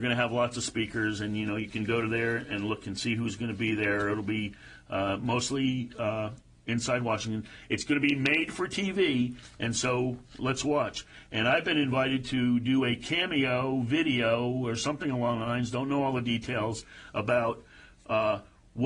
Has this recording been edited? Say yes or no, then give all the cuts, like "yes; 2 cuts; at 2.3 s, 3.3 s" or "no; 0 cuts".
no; 0 cuts